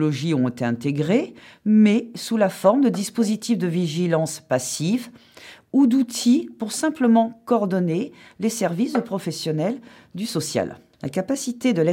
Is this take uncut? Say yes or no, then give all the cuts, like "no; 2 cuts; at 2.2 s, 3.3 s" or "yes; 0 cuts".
no; 1 cut; at 10.9 s